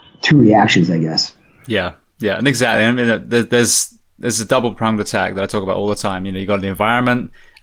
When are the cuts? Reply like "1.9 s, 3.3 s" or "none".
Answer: none